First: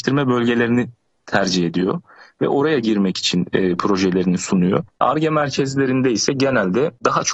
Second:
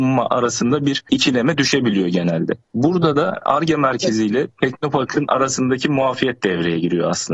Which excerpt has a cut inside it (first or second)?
second